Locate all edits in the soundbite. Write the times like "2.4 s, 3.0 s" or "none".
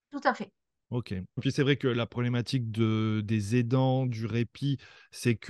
1.4 s

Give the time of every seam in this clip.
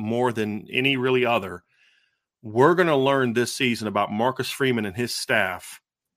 none

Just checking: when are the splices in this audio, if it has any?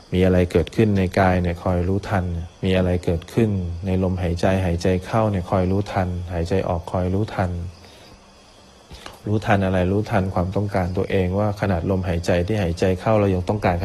2.5 s

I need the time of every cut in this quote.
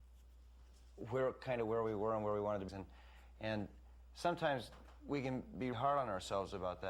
2.7 s, 5.7 s

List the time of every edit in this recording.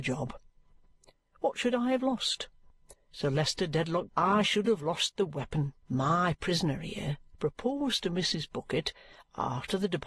4.1 s, 5.8 s

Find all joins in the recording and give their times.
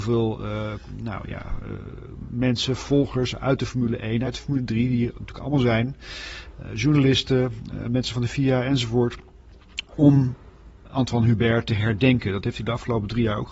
4.2 s

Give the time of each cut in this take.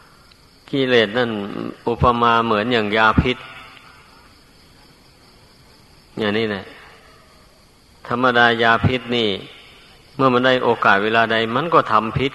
none

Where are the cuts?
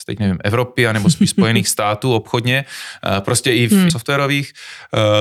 3.9 s

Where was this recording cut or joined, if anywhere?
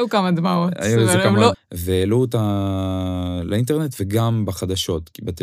1.5 s

